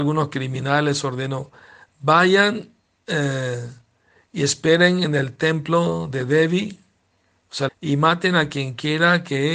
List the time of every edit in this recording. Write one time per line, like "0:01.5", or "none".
0:07.7